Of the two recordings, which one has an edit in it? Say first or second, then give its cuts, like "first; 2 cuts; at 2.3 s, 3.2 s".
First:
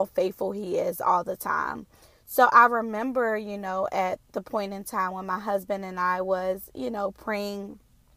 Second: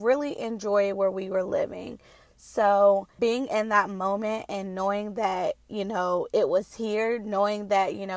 second; 1 cut; at 3.2 s